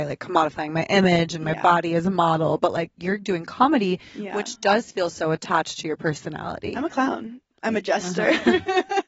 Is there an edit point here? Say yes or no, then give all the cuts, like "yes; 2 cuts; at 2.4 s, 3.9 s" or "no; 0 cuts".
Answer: no; 0 cuts